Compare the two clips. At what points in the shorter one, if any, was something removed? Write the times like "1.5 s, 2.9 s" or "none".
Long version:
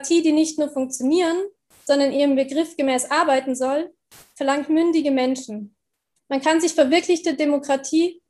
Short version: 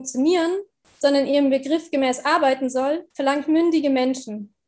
3.1 s